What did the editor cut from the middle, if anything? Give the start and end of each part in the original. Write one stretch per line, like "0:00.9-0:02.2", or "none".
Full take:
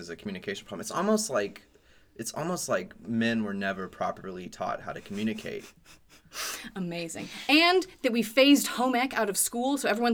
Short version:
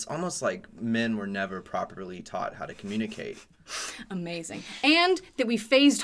0:05.8-0:06.2